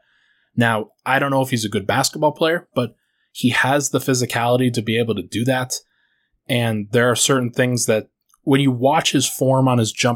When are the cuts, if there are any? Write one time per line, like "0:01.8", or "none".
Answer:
0:02.7